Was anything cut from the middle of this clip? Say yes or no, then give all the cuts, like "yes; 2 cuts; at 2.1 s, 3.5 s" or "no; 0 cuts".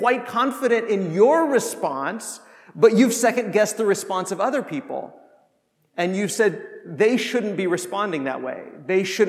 no; 0 cuts